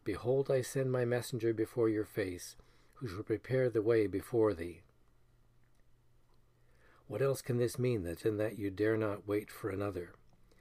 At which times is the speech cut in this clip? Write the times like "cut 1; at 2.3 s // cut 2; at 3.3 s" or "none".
none